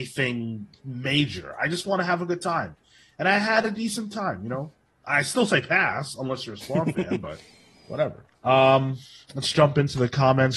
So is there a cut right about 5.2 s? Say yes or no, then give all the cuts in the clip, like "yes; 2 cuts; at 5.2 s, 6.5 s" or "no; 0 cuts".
no; 1 cut; at 8.3 s